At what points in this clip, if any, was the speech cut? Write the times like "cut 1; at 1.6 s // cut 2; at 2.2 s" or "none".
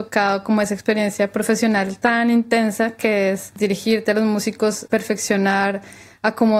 cut 1; at 4.9 s